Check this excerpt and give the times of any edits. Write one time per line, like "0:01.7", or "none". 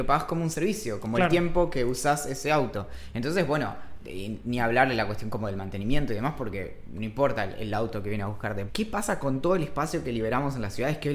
0:08.7